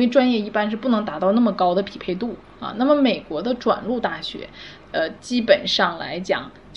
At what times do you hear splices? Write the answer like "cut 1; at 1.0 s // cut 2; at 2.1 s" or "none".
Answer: cut 1; at 4.8 s